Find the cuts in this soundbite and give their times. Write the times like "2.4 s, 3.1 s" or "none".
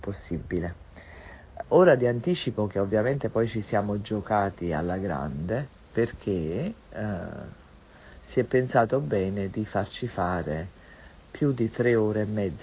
1.6 s